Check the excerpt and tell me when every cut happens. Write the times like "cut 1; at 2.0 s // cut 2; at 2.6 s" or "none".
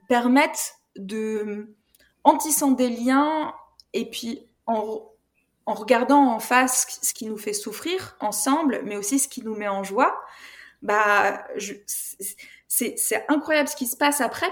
none